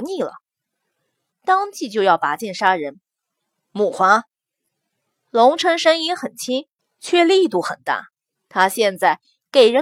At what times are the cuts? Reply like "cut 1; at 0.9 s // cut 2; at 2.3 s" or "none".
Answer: cut 1; at 1.3 s // cut 2; at 8.3 s